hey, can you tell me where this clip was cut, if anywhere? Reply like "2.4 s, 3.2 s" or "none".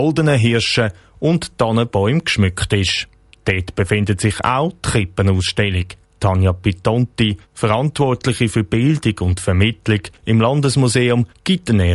none